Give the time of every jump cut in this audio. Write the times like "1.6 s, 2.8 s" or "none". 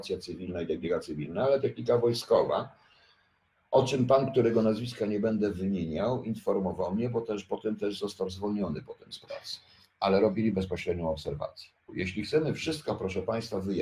11.9 s